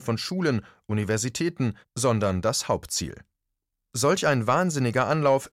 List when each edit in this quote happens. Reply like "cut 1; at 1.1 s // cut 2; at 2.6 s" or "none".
cut 1; at 1.8 s